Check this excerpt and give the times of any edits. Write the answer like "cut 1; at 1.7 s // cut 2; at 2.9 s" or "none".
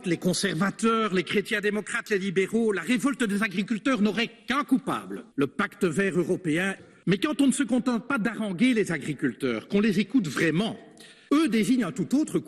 none